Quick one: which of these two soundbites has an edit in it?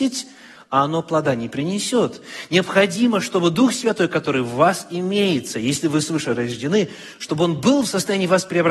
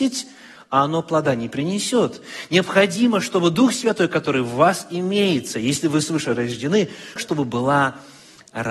second; 1 cut; at 7.2 s

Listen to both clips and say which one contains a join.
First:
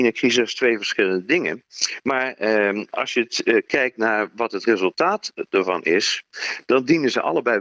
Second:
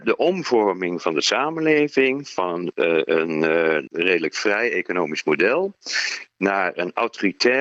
second; 1 cut; at 3.9 s

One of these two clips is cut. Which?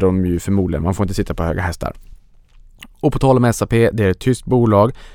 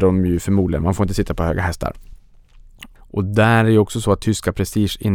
second; 1 cut; at 3.0 s

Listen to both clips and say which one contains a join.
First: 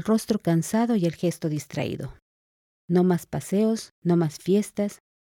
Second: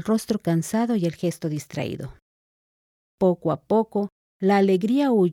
first; 2 cuts; at 2.7 s, 3.9 s

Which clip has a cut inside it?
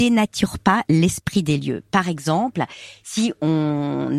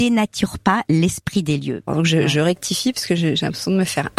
second; 1 cut; at 1.9 s

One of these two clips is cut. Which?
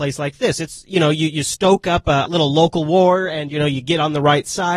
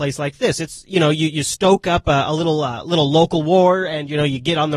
first; 1 cut; at 2.3 s

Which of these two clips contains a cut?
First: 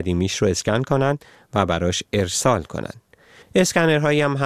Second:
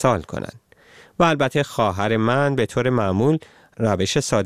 first; 1 cut; at 3.4 s

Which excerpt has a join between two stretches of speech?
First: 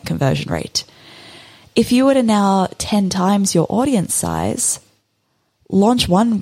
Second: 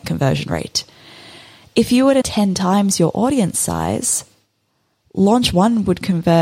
second; 1 cut; at 2.2 s

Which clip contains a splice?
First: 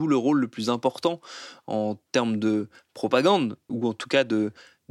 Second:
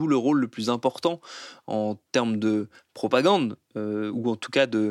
first; 1 cut; at 3.7 s

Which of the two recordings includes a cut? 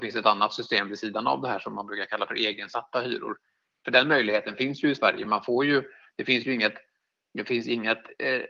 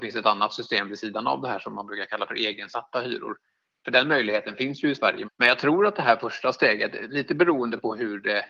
second; 1 cut; at 5.2 s

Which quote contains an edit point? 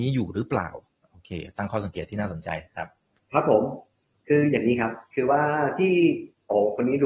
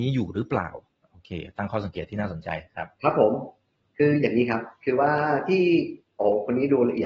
second; 1 cut; at 2.9 s

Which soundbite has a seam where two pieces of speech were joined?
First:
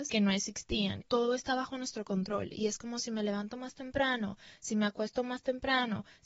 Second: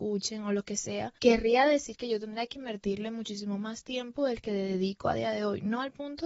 first; 1 cut; at 1.0 s

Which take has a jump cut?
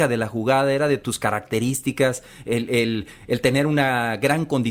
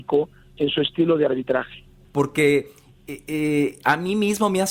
second; 1 cut; at 2.0 s

